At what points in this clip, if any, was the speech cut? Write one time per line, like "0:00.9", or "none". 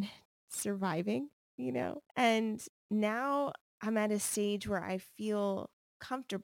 0:02.1